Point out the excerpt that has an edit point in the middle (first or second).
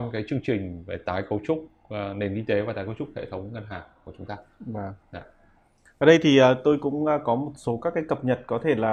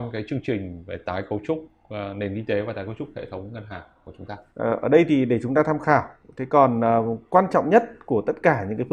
second